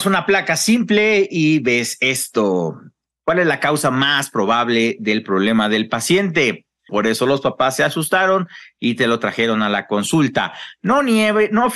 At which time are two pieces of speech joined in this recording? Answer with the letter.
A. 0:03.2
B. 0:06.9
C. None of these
B